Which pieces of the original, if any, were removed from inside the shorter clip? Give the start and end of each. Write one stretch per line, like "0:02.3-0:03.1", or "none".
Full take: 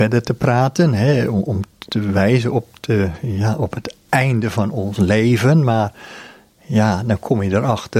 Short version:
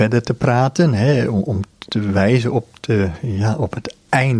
none